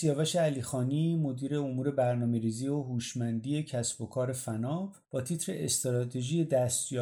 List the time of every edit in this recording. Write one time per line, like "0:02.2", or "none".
0:05.0

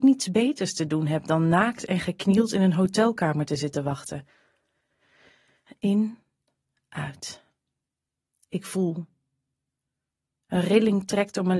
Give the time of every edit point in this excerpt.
0:05.7

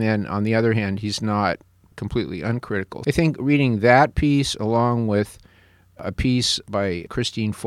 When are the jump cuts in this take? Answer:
none

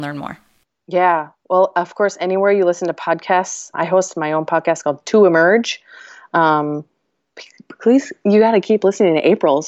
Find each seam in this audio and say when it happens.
0:03.7

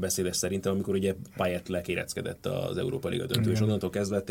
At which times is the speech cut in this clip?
none

